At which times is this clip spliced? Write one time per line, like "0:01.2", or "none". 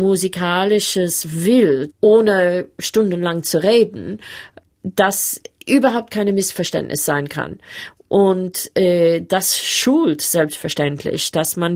0:01.9